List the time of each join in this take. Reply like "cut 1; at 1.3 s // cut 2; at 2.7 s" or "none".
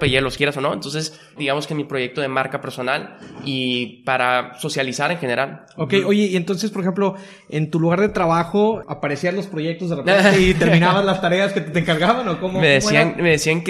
cut 1; at 1.4 s